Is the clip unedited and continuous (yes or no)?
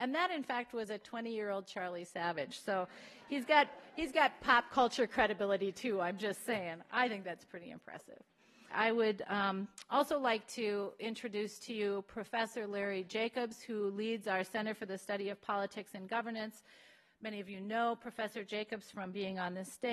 no